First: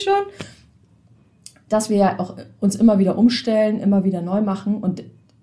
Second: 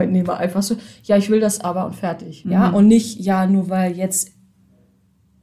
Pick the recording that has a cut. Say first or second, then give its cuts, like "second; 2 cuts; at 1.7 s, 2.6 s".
second; 1 cut; at 2.4 s